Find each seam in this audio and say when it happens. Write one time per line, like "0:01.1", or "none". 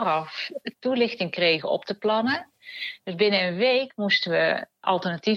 none